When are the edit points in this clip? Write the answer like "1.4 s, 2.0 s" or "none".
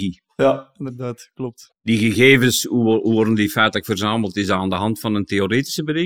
none